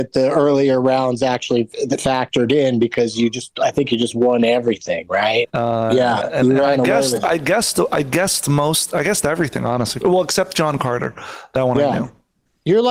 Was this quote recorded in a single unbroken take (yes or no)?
no